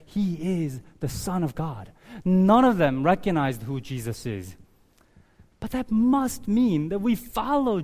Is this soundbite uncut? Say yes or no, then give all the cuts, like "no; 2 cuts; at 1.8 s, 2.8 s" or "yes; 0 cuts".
no; 1 cut; at 5.5 s